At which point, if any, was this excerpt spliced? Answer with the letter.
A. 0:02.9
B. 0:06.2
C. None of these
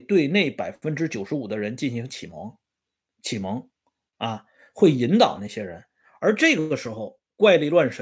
B